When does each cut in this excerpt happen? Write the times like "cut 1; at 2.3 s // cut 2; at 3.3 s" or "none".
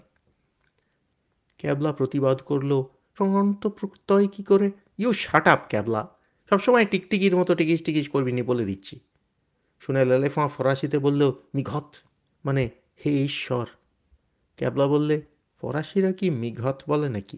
cut 1; at 3.2 s